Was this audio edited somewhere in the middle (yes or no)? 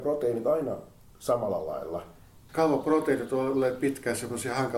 yes